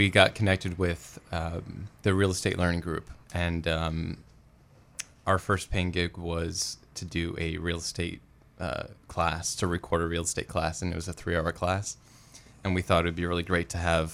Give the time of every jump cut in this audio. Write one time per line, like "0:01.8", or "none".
0:03.2

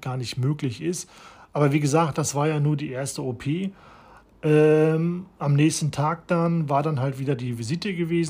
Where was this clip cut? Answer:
none

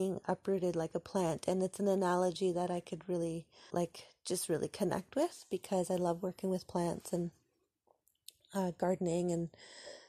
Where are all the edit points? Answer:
0:03.7

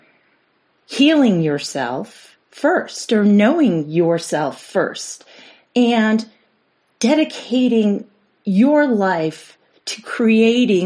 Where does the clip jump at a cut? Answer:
0:02.4

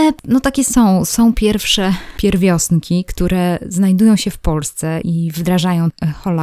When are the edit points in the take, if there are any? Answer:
0:05.0

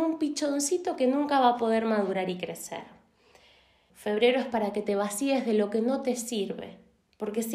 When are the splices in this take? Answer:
0:03.9

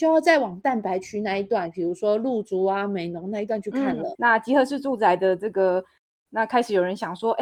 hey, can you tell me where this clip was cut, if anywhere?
0:04.1
0:06.3

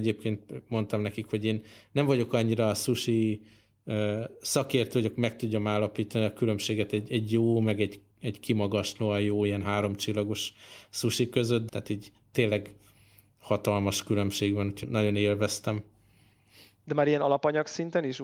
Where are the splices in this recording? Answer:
0:08.1
0:11.7
0:14.8

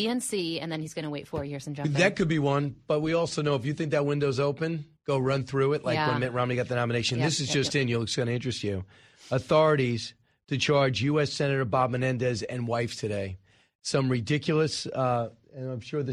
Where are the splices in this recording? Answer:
0:05.0

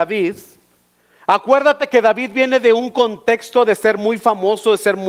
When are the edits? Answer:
none

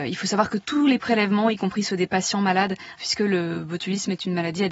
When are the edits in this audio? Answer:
0:03.0

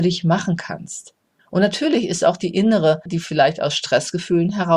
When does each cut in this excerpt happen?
0:03.1

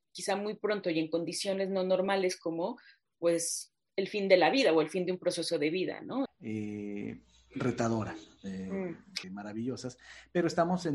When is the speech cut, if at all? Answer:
0:06.3
0:09.2

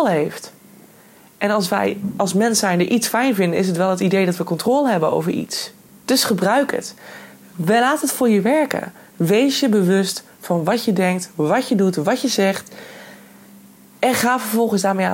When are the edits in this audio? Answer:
0:05.9

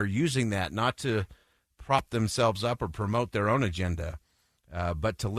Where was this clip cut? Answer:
none

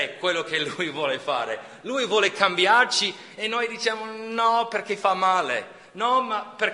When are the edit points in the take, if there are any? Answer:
none

